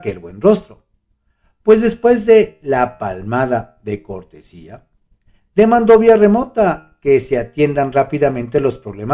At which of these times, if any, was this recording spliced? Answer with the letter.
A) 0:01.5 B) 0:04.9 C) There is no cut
C